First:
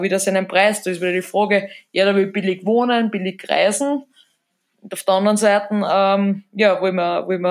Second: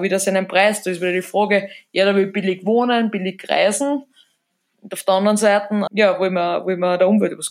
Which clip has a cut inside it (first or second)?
second